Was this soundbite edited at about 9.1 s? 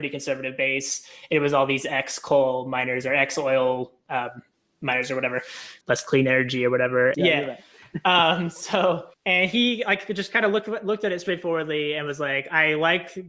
yes; 3 cuts; at 5.8 s, 7.1 s, 9.1 s

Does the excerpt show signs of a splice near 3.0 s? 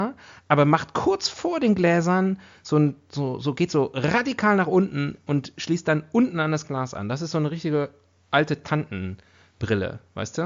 no; 0 cuts

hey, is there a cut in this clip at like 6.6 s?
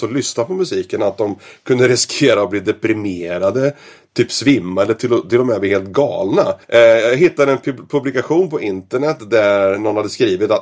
yes; 1 cut; at 6.6 s

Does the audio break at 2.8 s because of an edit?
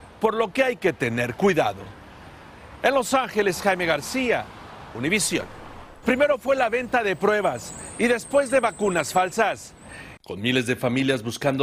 no; 2 cuts; at 6.0 s, 10.2 s

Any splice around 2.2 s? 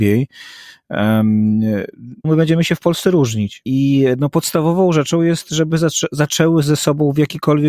yes; 2 cuts; at 2.2 s, 3.6 s

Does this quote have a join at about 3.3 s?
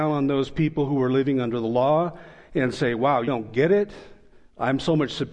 yes; 1 cut; at 3.3 s

